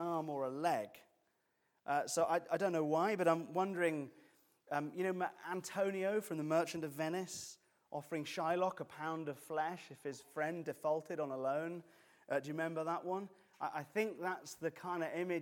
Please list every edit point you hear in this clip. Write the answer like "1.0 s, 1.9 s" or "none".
none